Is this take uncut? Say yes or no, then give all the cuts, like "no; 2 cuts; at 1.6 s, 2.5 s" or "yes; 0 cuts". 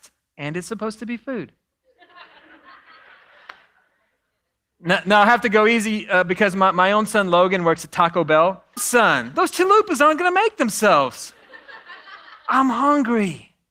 no; 1 cut; at 8.8 s